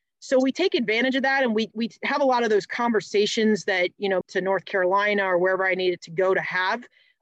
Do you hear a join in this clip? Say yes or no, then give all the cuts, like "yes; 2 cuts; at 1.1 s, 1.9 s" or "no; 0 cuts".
yes; 1 cut; at 4.2 s